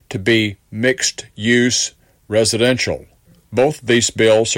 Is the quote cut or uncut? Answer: uncut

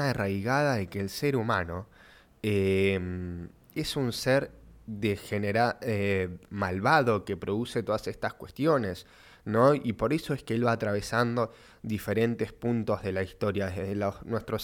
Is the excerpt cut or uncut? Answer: uncut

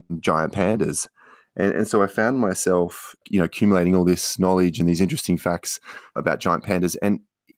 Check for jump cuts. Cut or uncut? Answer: cut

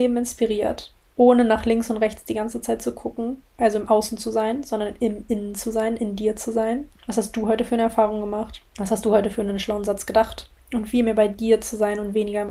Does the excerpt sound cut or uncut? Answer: cut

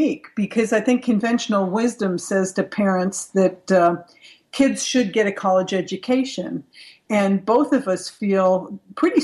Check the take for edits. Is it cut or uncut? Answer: uncut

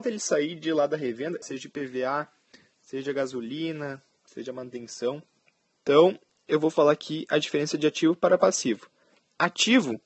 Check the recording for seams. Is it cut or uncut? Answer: cut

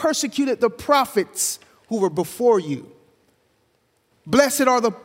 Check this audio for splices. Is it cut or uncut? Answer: cut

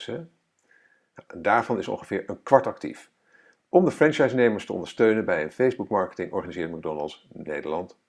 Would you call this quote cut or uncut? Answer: cut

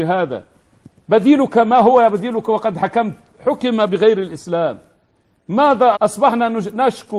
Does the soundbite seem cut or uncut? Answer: cut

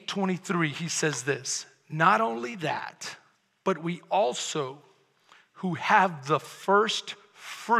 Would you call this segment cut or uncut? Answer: uncut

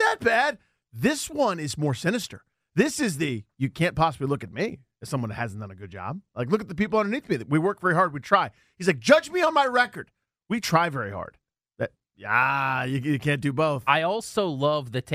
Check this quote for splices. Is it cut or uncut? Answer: uncut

